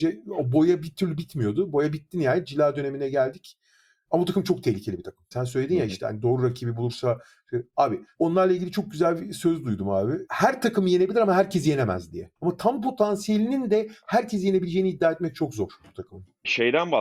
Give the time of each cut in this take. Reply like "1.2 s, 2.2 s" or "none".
5.3 s, 12.4 s